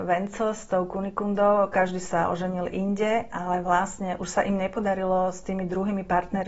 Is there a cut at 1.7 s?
no; 1 cut; at 4.2 s

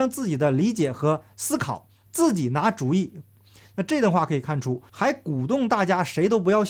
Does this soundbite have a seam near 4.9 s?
yes; 2 cuts; at 3.4 s, 4.9 s

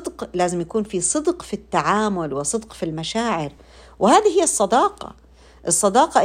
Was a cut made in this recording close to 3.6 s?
no; 0 cuts

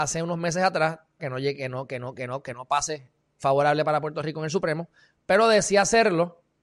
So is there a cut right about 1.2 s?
yes; 2 cuts; at 1.2 s, 3.4 s

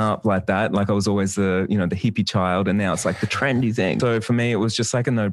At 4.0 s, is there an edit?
yes; 1 cut; at 4.0 s

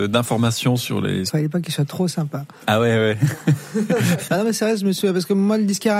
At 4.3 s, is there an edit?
yes; 2 cuts; at 1.3 s, 4.3 s

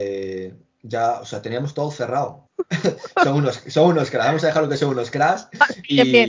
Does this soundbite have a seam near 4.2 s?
no; 1 cut; at 2.5 s

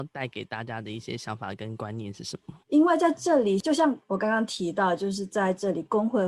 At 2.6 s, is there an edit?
yes; 1 cut; at 2.6 s

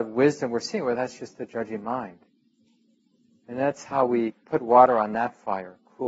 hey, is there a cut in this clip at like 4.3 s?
yes; 1 cut; at 4.3 s

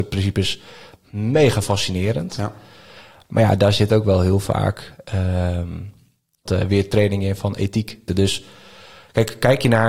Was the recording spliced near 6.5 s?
yes; 2 cuts; at 6.5 s, 8.1 s

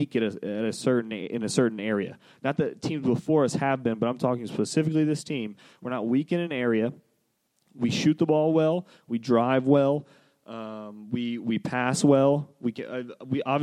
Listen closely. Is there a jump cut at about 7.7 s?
no; 0 cuts

